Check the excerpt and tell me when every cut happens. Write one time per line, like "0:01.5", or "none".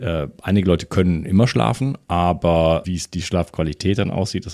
0:02.8